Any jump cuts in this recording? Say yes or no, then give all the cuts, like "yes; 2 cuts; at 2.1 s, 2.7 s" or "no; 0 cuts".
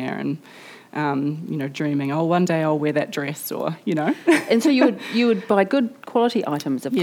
no; 0 cuts